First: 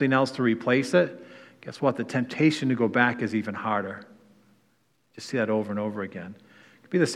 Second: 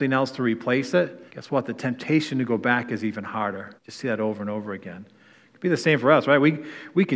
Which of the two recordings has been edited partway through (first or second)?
second